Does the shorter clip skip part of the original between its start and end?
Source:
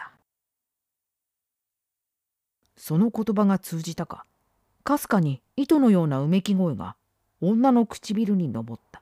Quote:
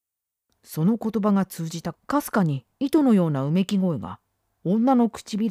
yes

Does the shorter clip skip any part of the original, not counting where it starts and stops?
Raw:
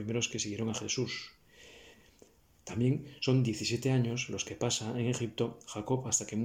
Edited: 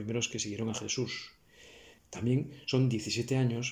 yes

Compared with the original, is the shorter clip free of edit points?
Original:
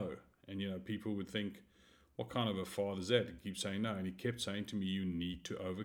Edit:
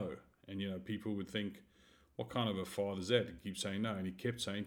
yes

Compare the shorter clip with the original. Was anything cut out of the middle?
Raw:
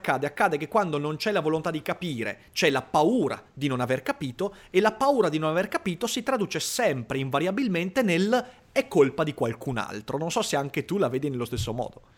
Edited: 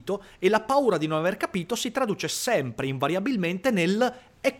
no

